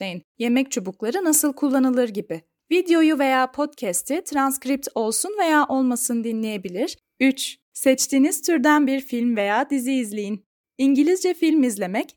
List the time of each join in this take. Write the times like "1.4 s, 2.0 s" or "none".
7.0 s